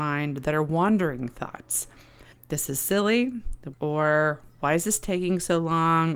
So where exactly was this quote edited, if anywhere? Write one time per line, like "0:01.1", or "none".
0:02.3
0:03.7